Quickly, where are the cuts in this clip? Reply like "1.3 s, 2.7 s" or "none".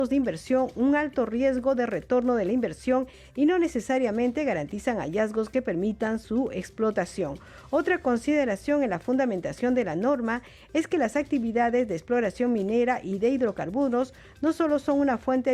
none